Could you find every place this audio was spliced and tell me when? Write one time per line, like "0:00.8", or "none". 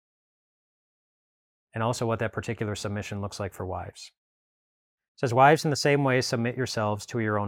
0:05.0